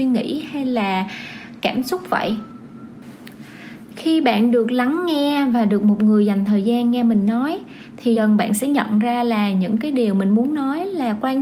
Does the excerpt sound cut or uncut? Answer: cut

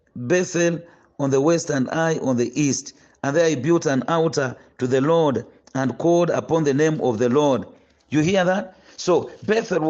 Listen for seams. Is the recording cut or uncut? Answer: uncut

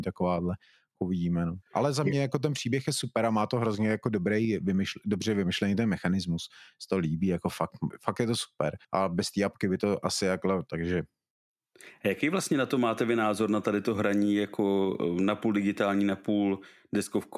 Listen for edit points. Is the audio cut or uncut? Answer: cut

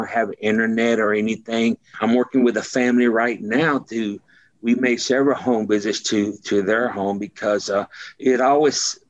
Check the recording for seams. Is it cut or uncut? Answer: cut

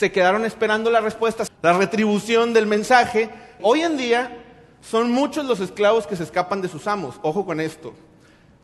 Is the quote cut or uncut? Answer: cut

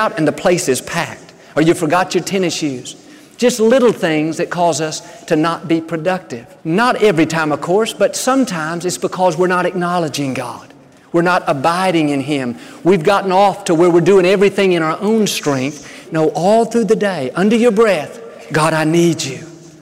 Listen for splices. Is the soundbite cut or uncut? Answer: cut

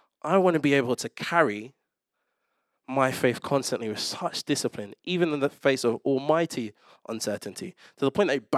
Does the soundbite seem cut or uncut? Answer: uncut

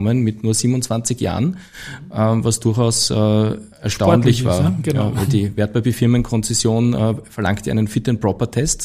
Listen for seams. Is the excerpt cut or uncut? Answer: uncut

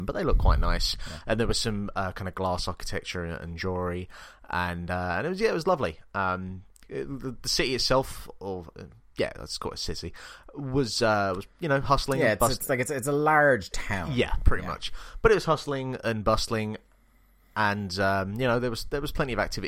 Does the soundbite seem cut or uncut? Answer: uncut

